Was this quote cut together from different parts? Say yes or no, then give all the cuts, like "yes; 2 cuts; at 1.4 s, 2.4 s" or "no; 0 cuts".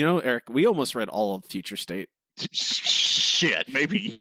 yes; 1 cut; at 2.3 s